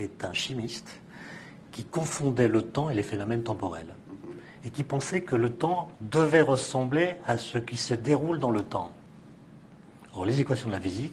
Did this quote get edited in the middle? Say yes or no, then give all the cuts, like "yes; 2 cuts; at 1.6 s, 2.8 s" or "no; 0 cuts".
no; 0 cuts